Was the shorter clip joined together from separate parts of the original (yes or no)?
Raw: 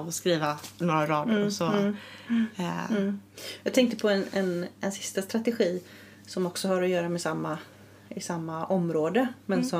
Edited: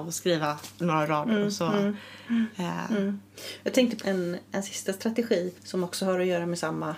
yes